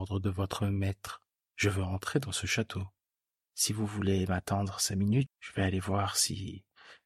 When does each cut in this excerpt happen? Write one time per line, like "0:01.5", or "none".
0:03.5
0:05.3